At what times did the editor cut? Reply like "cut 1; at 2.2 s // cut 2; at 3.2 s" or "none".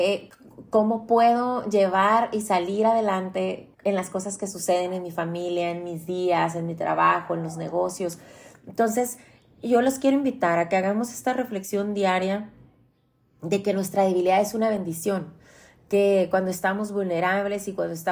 cut 1; at 3.7 s